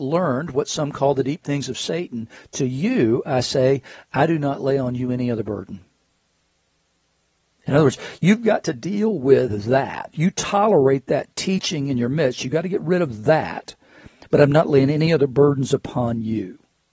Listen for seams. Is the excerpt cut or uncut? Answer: uncut